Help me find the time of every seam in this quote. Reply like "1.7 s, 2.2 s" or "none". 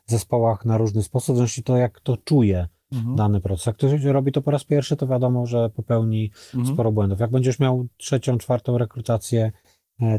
none

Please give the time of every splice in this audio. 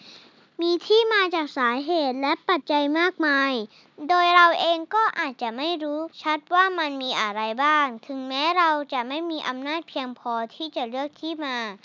2.6 s, 6.1 s

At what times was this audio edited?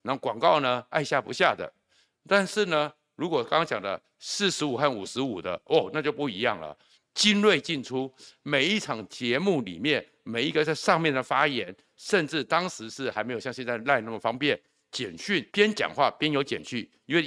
15.5 s

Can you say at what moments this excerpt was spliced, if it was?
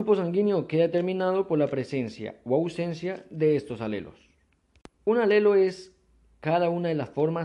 4.9 s

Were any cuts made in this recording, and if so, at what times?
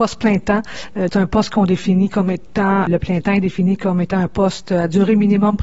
1.1 s, 2.9 s

